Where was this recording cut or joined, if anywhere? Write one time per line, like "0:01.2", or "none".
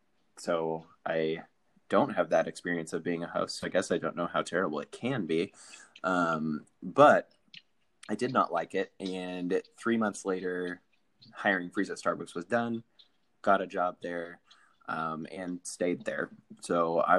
none